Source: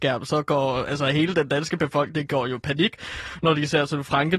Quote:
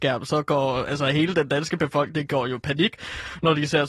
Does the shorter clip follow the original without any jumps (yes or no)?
yes